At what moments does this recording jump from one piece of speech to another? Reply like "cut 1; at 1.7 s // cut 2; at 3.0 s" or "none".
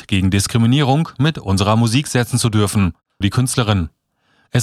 cut 1; at 3.2 s